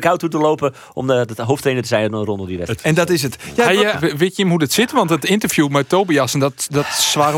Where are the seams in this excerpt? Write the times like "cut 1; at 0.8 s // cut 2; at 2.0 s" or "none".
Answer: cut 1; at 2.8 s // cut 2; at 3.9 s